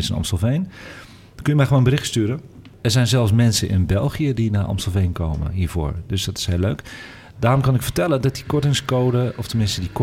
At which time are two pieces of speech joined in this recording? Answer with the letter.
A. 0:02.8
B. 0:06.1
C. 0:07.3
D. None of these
D